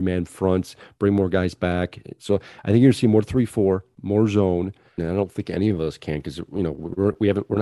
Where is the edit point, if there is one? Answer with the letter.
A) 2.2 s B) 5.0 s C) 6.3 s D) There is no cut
B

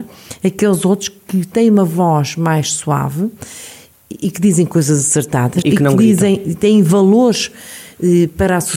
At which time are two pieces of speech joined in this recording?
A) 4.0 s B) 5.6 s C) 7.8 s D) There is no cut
B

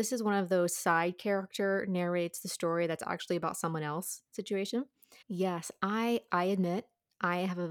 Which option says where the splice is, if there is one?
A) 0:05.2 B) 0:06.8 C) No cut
A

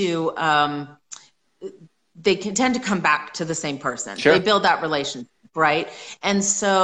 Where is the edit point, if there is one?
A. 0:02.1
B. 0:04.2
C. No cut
C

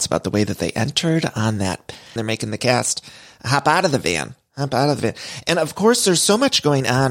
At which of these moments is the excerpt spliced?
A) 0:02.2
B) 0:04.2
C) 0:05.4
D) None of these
A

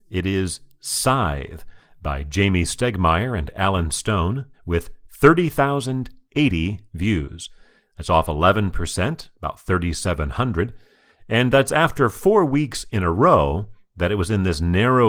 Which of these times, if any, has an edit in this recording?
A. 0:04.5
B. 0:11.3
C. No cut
A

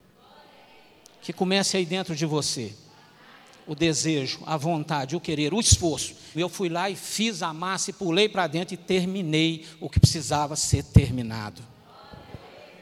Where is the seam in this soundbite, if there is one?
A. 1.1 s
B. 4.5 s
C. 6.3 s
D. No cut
C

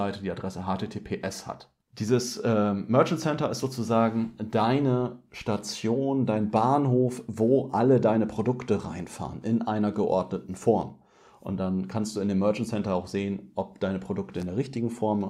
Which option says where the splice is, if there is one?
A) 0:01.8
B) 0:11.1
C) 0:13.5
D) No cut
A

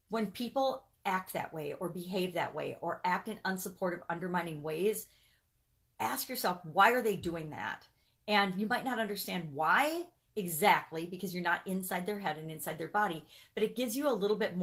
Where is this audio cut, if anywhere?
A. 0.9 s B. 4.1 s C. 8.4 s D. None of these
A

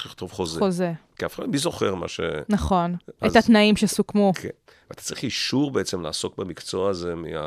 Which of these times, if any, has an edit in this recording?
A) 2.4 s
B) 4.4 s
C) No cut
C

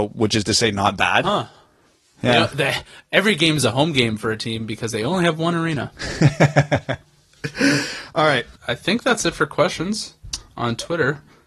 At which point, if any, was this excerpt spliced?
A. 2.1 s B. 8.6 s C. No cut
B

